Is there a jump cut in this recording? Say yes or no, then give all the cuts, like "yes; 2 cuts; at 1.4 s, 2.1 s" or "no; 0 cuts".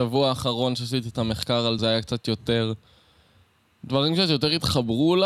yes; 1 cut; at 1.8 s